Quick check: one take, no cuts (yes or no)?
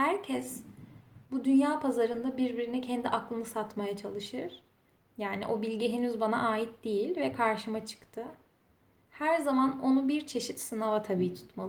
no